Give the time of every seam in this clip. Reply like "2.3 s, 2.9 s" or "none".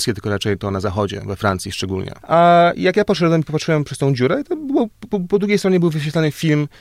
2.2 s